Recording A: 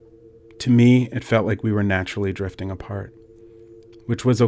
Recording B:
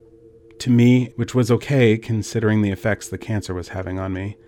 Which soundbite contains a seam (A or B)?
B